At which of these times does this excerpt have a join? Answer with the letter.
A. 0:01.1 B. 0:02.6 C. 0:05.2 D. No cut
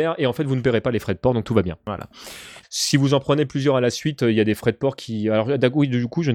B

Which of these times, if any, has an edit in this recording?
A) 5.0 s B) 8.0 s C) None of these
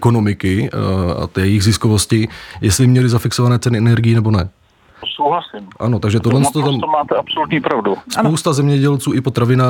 A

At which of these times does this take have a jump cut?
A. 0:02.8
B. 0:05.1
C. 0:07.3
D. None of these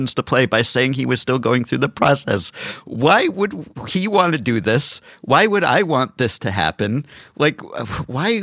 A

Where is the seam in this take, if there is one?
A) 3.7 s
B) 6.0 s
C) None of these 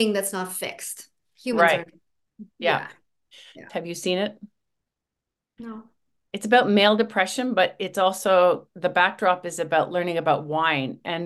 A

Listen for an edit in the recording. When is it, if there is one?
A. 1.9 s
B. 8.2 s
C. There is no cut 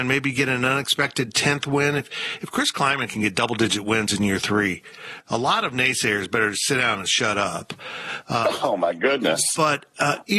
C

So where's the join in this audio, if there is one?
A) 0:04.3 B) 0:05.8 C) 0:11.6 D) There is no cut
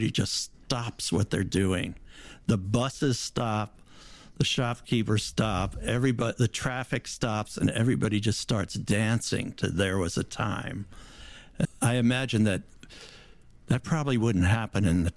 C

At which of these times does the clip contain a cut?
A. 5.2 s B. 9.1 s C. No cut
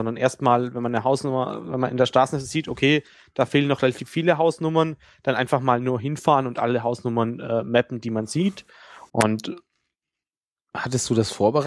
B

